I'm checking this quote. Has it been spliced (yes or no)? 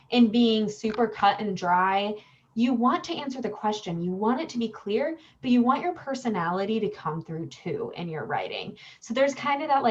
no